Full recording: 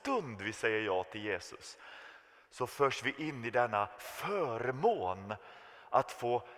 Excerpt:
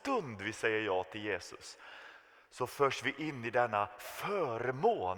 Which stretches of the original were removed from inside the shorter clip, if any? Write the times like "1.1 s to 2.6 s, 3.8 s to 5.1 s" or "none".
none